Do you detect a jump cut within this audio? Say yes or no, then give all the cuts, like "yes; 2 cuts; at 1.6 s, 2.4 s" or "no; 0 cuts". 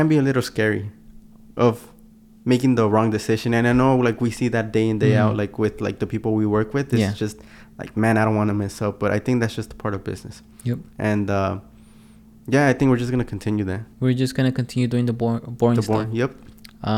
no; 0 cuts